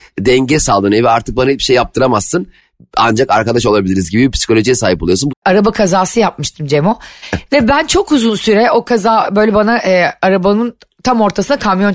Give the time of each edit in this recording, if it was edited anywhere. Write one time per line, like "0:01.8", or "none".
0:05.3
0:07.2